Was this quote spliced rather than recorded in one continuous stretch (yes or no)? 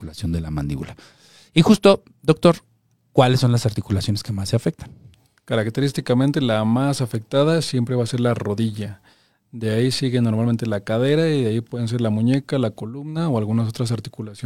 no